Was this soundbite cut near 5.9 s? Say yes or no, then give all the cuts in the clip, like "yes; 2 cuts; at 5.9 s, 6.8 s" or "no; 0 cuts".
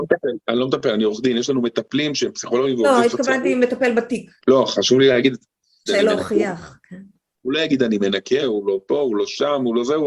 yes; 3 cuts; at 4.4 s, 5.9 s, 8.4 s